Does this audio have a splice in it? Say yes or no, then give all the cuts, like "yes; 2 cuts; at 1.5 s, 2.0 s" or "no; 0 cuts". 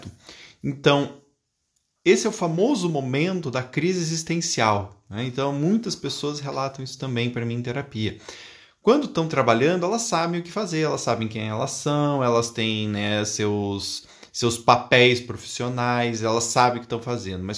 no; 0 cuts